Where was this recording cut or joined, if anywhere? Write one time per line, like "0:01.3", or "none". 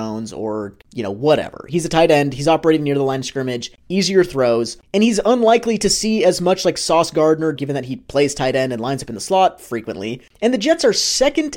0:07.6